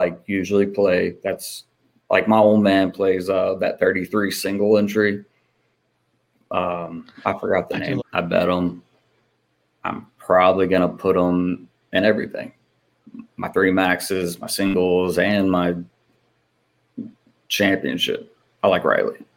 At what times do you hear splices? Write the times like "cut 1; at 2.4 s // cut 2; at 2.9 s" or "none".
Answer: cut 1; at 8.0 s